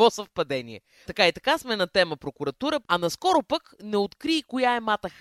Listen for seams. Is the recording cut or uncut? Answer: cut